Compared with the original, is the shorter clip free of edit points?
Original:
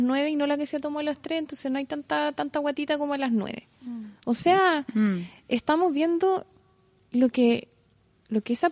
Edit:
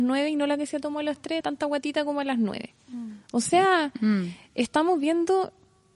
no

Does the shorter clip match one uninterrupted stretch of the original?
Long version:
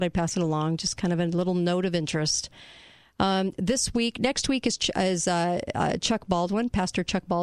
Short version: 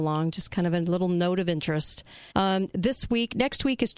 no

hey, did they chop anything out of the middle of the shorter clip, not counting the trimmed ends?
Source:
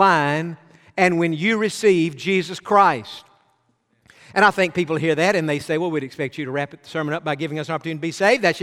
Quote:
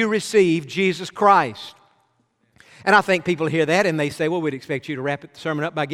no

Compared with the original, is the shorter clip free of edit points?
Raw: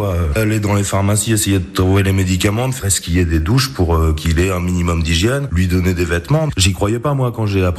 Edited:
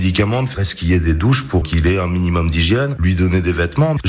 no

